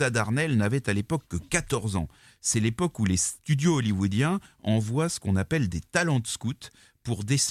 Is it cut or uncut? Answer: uncut